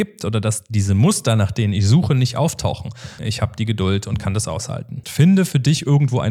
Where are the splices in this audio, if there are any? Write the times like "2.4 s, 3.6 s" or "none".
3.2 s, 5.0 s